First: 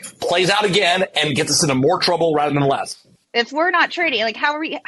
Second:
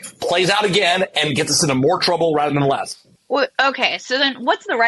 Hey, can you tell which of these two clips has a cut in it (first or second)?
first